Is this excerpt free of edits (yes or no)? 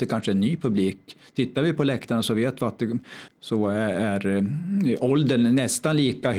no